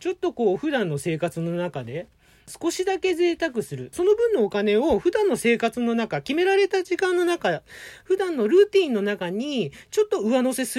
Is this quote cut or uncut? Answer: cut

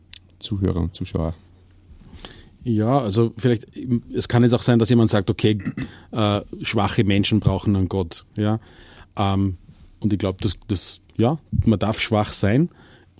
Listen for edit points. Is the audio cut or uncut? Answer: uncut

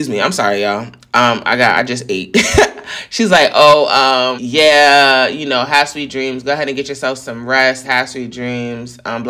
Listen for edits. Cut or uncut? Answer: cut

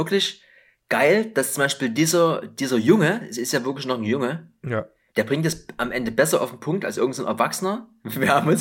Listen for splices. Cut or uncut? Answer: uncut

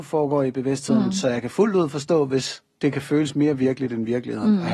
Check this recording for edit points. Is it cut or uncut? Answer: uncut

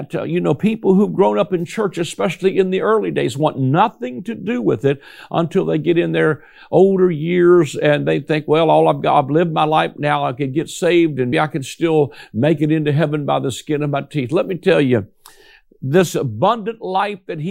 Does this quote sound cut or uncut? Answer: cut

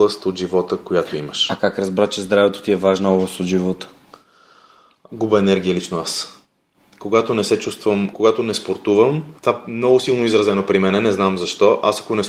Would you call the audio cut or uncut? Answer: cut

